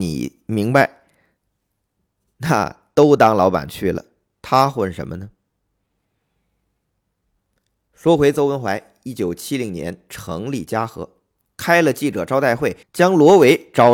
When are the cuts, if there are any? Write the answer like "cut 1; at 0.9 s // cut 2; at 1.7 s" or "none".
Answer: cut 1; at 12.8 s

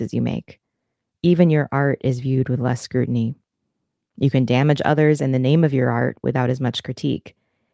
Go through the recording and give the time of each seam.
none

